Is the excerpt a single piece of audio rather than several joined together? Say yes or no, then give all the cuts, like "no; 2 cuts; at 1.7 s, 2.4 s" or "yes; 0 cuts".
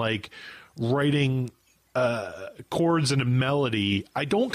yes; 0 cuts